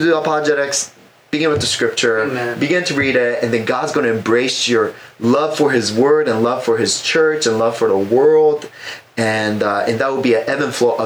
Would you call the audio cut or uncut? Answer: uncut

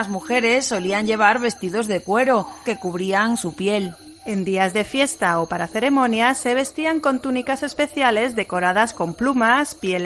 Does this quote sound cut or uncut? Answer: cut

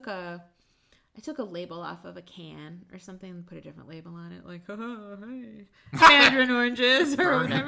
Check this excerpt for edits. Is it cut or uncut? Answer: cut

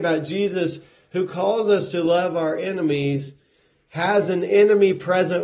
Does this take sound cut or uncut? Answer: uncut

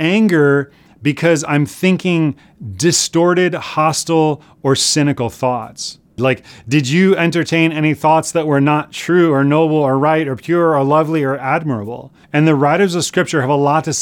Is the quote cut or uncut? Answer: cut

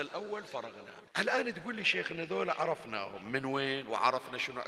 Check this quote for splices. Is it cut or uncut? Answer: cut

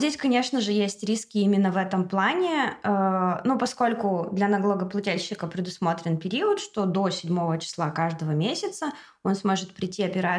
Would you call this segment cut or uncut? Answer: uncut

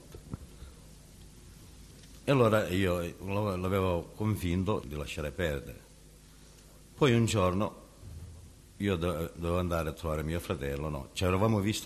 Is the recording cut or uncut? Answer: cut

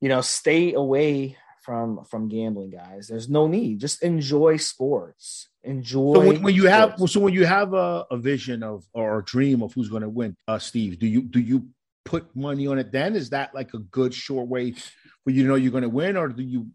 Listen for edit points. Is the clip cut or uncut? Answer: cut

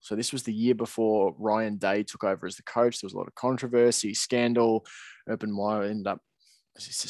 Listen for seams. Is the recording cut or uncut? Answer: uncut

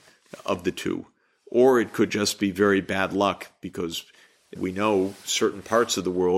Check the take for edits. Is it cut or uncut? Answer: cut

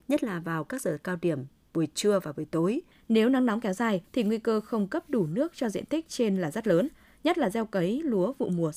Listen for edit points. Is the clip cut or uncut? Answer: cut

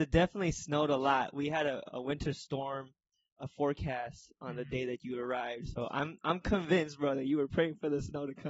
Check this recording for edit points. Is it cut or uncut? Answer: cut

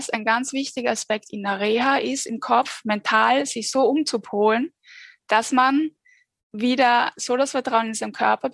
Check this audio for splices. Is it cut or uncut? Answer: uncut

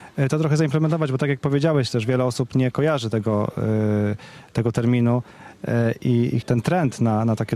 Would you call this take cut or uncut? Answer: cut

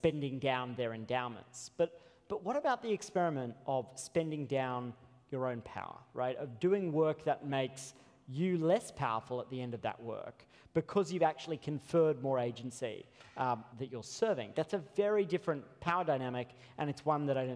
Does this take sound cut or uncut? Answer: cut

